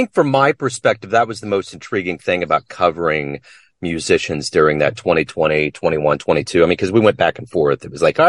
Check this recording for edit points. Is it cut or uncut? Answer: uncut